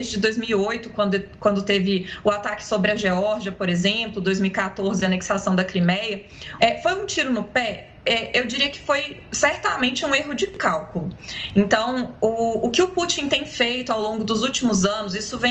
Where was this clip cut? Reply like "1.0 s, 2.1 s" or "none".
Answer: 6.6 s